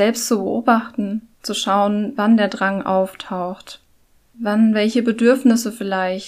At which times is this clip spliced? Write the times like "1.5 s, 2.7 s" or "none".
1.3 s